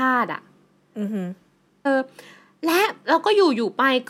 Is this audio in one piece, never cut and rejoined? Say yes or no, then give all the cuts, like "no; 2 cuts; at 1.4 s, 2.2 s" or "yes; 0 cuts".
no; 1 cut; at 1.9 s